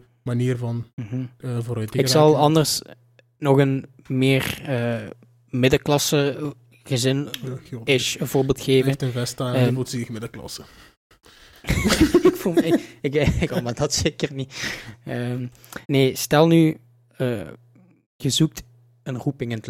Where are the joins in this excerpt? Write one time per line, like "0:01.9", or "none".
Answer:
0:13.5
0:15.8